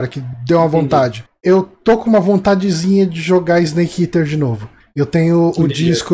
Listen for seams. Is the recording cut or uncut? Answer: cut